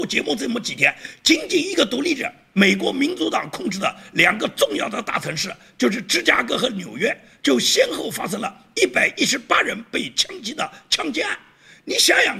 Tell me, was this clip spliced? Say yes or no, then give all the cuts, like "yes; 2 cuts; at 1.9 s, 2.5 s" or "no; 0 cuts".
no; 0 cuts